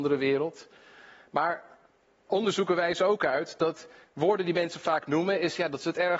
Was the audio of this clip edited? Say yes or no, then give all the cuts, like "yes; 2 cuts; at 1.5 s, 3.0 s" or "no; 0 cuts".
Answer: no; 0 cuts